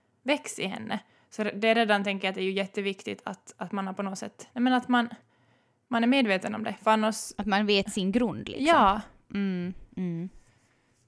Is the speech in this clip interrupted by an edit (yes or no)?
no